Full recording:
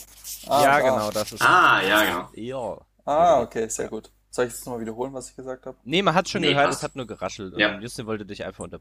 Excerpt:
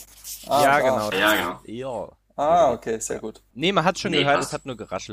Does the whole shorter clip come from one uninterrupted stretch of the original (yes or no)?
no